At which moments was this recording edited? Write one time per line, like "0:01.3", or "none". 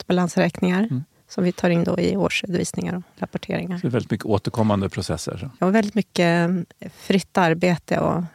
0:05.6